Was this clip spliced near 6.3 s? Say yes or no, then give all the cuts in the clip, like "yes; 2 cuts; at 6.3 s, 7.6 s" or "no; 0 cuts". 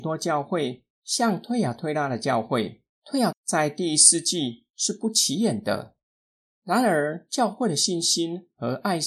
no; 1 cut; at 3.3 s